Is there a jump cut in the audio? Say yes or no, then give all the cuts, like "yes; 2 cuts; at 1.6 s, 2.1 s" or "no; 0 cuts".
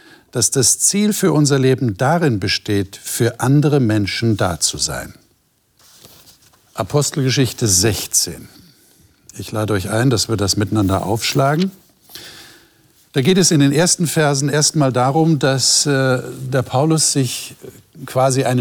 no; 0 cuts